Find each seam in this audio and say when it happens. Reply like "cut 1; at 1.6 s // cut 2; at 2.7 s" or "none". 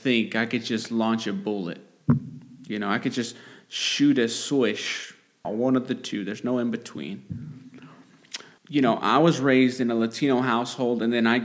cut 1; at 5.4 s // cut 2; at 8.6 s